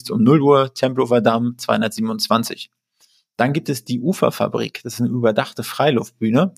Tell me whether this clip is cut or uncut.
uncut